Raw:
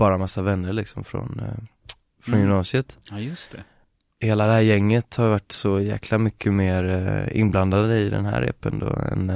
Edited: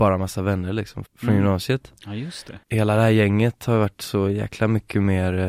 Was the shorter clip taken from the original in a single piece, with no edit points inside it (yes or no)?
no